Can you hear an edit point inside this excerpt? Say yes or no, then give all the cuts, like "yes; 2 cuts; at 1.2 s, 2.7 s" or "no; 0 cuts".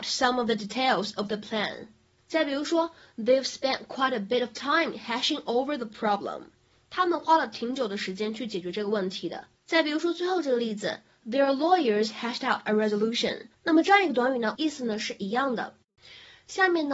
yes; 3 cuts; at 9.6 s, 13.5 s, 14.6 s